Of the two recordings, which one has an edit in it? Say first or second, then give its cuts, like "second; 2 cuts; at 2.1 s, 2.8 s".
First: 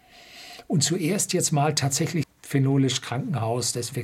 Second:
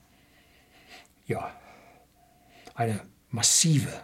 first; 1 cut; at 2.2 s